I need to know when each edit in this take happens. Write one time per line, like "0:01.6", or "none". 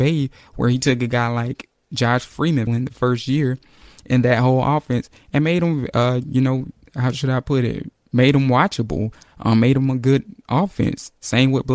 0:02.7